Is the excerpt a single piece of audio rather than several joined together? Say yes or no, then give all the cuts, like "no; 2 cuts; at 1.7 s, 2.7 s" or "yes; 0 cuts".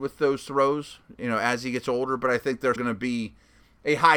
no; 1 cut; at 2.8 s